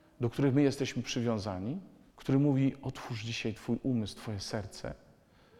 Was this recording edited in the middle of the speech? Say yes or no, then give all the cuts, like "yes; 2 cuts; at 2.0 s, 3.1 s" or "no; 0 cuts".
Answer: yes; 1 cut; at 2.1 s